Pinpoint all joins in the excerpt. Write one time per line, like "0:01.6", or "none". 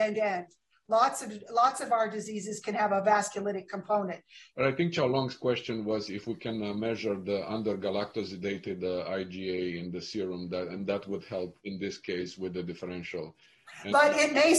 0:04.5
0:11.6